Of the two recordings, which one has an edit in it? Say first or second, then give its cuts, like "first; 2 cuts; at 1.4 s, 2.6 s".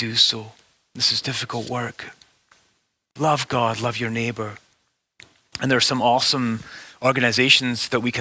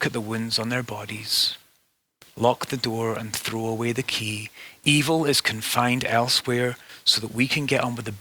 first; 1 cut; at 3.1 s